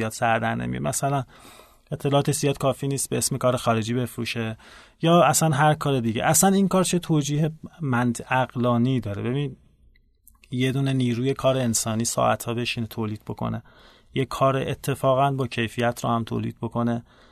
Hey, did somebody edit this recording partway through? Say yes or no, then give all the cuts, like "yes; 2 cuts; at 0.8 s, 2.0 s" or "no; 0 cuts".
no; 0 cuts